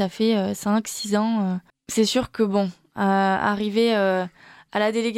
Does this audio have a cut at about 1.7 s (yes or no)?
yes